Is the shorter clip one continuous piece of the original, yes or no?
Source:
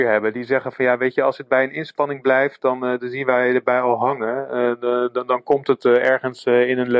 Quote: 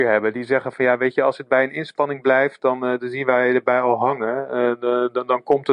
yes